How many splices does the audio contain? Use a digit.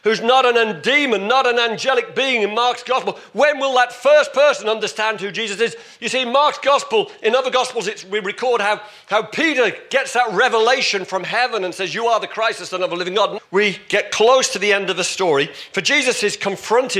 1